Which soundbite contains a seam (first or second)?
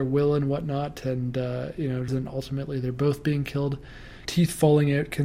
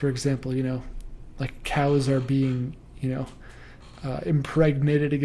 first